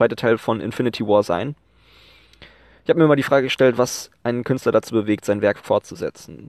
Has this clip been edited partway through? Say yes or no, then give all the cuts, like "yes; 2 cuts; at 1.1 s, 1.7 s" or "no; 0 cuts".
no; 0 cuts